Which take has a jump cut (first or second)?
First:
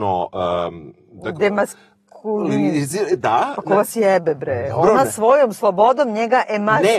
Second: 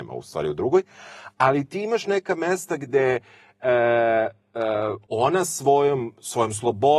second